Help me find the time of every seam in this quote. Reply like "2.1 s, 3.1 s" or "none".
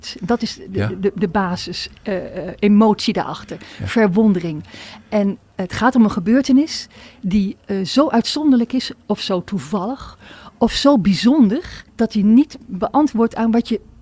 11.9 s

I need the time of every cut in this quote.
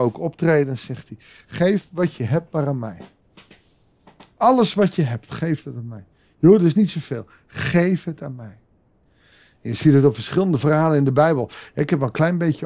none

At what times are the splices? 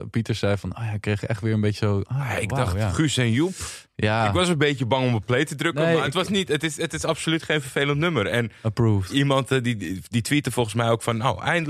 none

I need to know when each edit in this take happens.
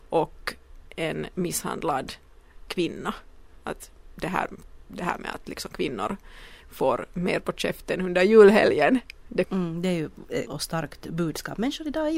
2.7 s, 9.4 s, 10.5 s

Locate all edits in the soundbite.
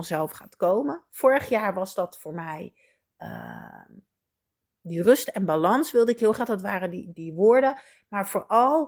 7.1 s

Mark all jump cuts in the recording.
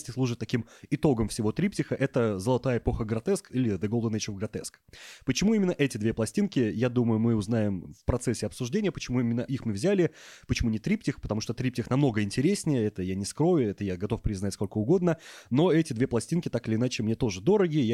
none

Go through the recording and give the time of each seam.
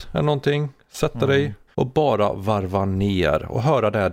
1.7 s

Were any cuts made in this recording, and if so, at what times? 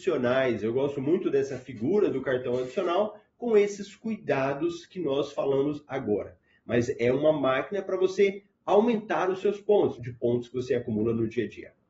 10.0 s

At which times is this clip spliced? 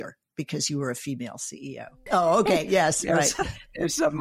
2.1 s

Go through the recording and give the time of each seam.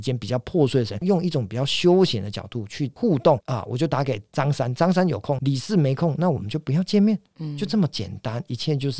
1.0 s, 5.4 s

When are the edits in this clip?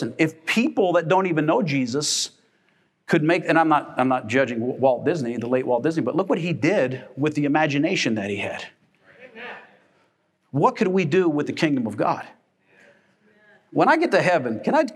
none

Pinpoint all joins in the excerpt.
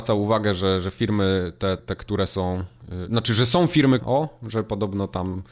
1.8 s, 4.0 s

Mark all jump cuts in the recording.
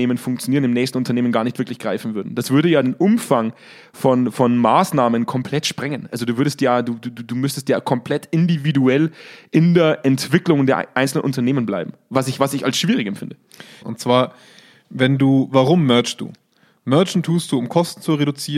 13.8 s

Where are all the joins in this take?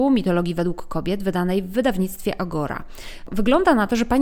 none

